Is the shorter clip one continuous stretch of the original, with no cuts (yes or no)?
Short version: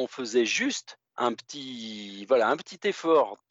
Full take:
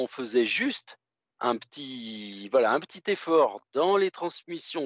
no